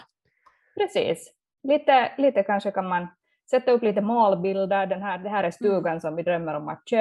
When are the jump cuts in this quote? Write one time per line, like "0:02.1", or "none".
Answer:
none